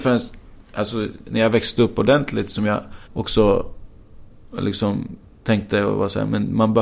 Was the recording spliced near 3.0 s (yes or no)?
yes